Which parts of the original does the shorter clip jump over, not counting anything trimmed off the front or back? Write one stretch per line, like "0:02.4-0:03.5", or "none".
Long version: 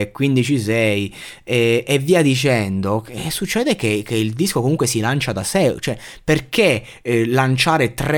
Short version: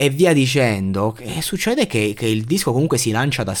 none